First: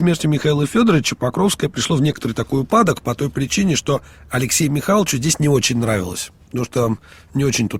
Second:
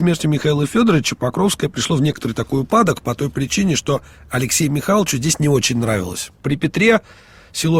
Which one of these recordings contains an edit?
second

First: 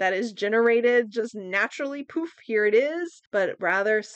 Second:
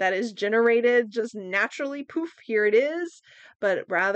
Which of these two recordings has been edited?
first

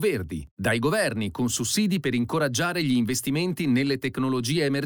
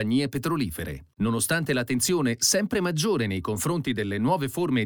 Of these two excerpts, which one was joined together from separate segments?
second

